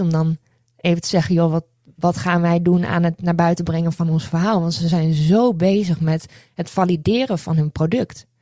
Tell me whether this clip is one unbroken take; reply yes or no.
yes